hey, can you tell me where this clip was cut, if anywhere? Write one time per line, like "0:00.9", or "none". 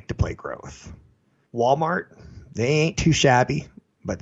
0:01.5